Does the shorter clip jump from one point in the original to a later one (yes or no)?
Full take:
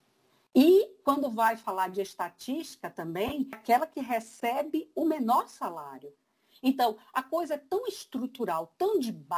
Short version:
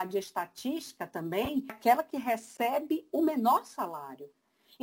no